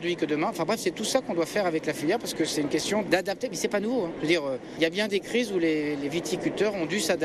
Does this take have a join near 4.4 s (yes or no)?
no